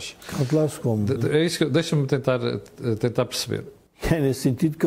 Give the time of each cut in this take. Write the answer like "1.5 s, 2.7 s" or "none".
1.2 s, 3.9 s